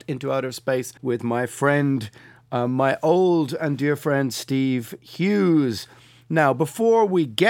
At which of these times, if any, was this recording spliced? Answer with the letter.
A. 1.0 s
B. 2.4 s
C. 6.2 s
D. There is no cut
A